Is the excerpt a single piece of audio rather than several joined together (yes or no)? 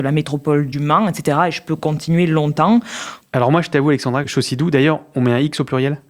no